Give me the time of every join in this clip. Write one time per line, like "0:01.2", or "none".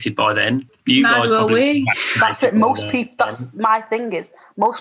none